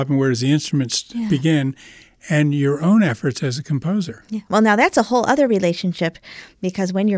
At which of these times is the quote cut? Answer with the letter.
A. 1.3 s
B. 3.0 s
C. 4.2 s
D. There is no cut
D